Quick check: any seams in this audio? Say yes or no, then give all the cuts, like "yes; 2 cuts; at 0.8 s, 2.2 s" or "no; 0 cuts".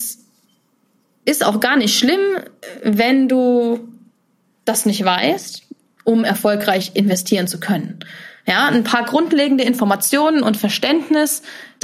yes; 1 cut; at 6.0 s